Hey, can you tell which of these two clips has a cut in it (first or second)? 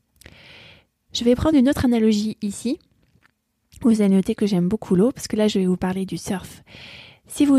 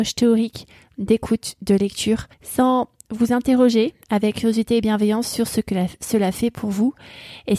second